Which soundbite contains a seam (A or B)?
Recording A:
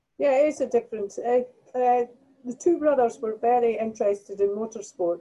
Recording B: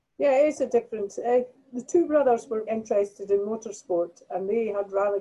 B